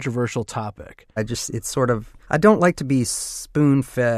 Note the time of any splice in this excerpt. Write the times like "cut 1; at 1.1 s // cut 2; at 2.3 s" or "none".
cut 1; at 1.2 s // cut 2; at 2.2 s